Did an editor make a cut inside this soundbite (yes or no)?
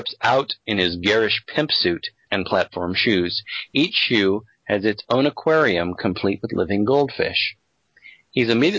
yes